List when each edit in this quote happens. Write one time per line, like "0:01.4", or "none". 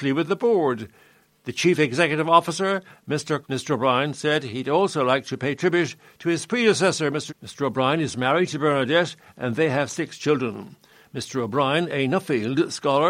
0:03.4
0:07.3